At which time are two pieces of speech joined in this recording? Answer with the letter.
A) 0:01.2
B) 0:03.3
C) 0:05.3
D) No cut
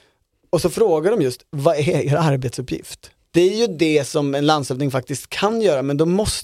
B